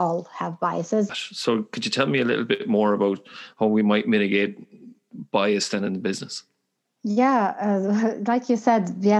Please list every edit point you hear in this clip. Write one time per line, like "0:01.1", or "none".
0:01.1